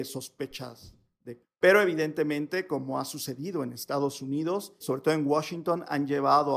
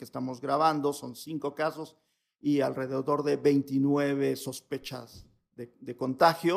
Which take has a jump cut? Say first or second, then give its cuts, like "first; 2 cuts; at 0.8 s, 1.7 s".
first; 2 cuts; at 1.4 s, 4.8 s